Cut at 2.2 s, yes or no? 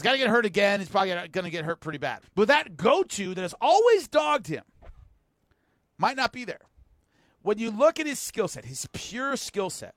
yes